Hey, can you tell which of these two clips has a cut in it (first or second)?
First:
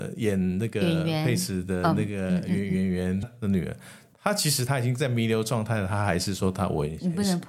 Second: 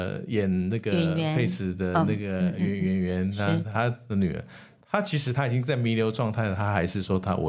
first